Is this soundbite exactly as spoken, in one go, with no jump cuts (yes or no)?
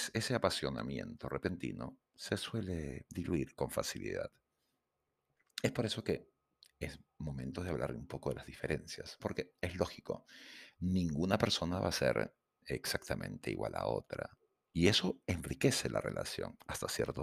no